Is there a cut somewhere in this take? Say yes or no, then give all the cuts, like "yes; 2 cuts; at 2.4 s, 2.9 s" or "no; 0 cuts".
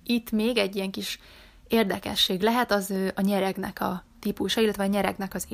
no; 0 cuts